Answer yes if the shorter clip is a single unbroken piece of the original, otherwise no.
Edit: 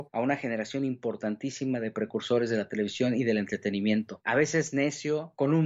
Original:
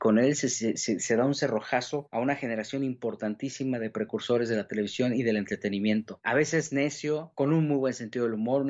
yes